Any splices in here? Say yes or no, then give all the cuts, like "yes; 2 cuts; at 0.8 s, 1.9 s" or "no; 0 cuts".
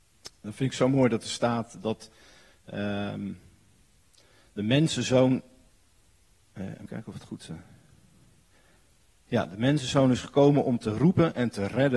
yes; 1 cut; at 6.9 s